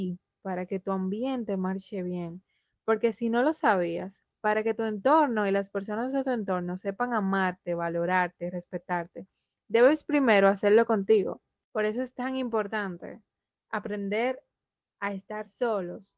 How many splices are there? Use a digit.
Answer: 1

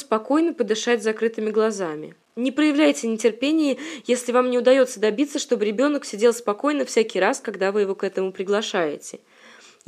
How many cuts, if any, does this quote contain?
0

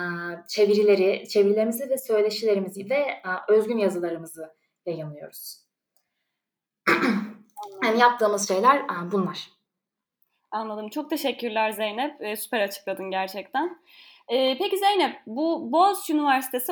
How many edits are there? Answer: 0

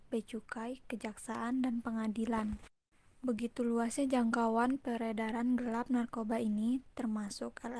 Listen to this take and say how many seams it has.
1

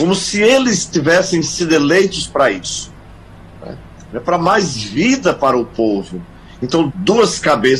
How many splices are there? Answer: 2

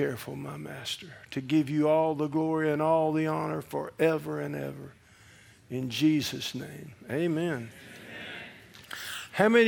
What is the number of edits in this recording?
0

